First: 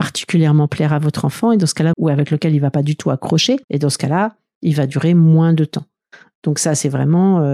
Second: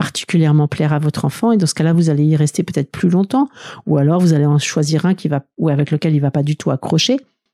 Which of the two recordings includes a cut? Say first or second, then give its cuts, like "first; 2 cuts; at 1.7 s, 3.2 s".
first; 2 cuts; at 1.9 s, 3.6 s